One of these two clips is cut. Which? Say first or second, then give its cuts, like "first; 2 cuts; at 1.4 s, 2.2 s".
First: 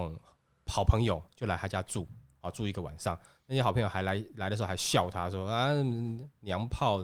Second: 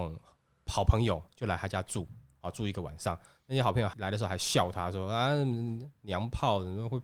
second; 1 cut; at 3.9 s